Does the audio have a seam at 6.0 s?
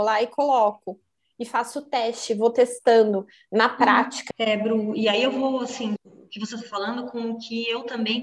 yes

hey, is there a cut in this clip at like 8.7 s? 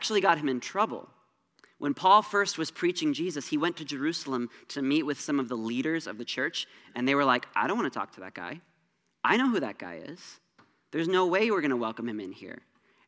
no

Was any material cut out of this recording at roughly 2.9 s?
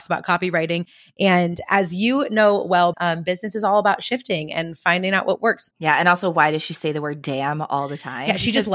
yes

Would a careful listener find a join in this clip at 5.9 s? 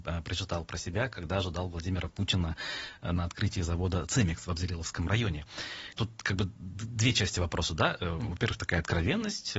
yes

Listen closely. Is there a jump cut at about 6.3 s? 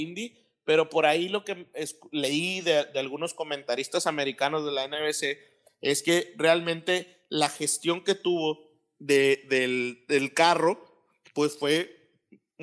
no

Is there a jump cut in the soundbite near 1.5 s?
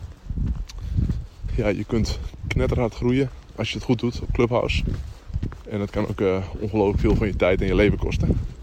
yes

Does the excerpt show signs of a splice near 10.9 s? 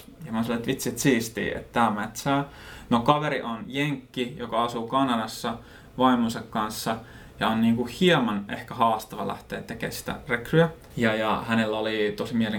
yes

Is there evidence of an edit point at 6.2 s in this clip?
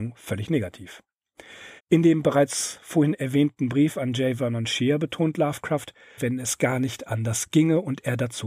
yes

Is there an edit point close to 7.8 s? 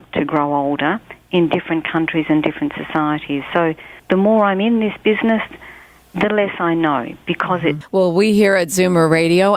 yes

